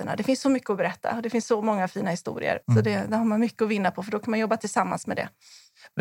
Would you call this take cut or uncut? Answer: cut